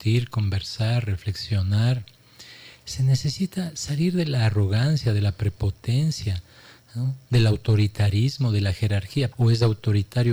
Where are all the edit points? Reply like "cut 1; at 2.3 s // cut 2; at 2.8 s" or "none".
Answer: cut 1; at 9.3 s